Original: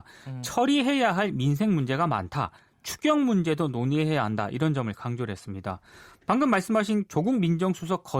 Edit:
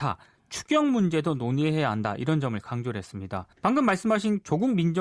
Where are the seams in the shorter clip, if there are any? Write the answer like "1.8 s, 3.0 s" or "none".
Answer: 3.5 s